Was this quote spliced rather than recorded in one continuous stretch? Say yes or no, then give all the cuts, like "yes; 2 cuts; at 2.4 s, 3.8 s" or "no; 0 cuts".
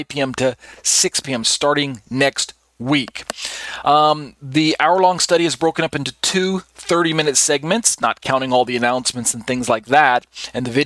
no; 0 cuts